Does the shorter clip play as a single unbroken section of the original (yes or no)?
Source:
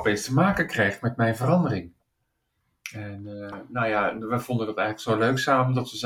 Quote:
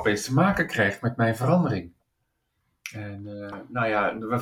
yes